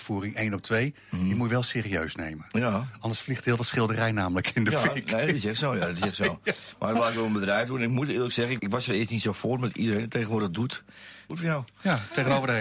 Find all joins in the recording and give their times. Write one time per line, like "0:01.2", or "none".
0:08.6
0:11.3